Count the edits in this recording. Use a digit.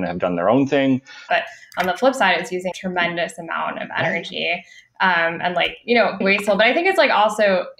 3